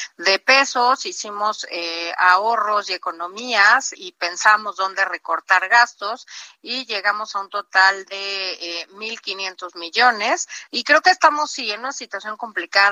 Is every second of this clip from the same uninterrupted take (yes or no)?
no